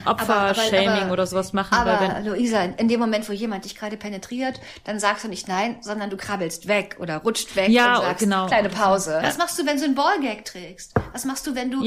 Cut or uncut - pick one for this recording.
cut